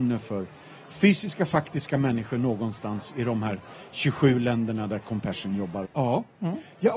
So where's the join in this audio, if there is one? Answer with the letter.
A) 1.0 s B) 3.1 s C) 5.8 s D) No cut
C